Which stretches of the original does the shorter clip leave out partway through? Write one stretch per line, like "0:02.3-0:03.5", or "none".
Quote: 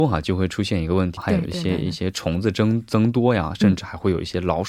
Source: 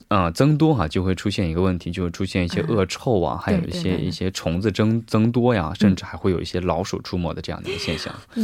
0:01.8-0:03.4